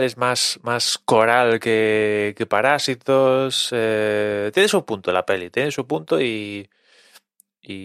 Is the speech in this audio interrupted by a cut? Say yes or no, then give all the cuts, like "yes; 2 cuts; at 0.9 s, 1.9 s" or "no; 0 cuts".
no; 0 cuts